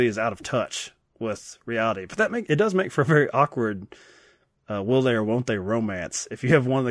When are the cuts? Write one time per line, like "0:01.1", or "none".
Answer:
none